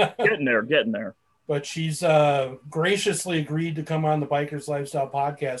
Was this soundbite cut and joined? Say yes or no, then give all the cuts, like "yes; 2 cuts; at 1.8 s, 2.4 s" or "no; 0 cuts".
no; 0 cuts